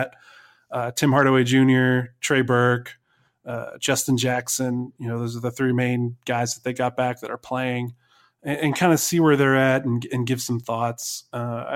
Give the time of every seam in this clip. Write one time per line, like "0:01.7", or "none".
none

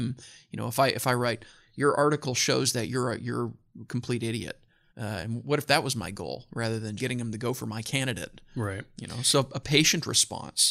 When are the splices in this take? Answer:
0:04.9
0:07.0

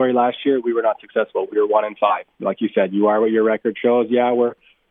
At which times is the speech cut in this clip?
none

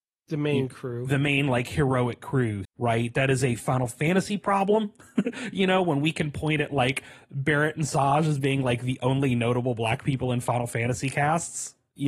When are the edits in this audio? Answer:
0:02.6

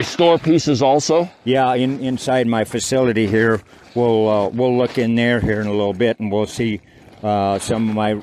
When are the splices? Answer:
none

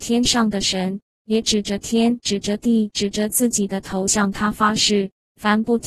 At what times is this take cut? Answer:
none

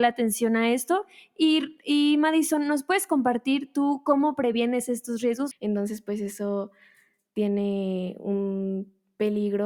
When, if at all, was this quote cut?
0:05.5

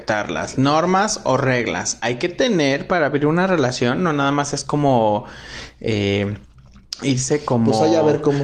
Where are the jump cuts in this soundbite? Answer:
none

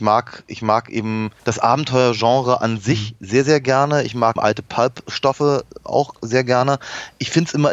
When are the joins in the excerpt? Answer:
0:01.4
0:04.4

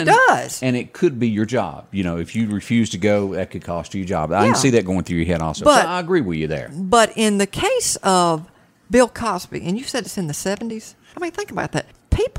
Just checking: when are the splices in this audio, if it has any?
0:11.1

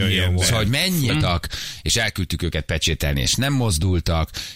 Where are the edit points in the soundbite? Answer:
0:01.1

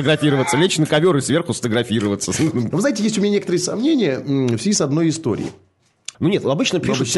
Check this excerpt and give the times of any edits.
0:02.7
0:06.1

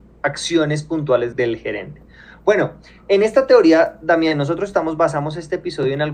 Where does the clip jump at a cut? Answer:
0:01.3

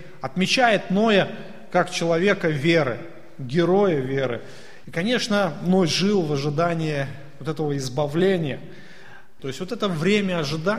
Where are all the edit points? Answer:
0:04.8
0:09.4

